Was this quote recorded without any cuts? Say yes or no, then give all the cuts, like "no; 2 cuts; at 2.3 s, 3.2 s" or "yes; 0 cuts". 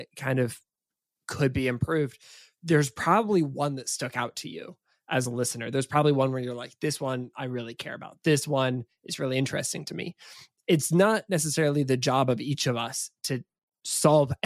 yes; 0 cuts